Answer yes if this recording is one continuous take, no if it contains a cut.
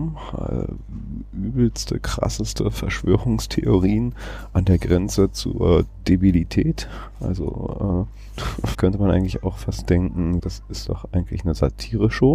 no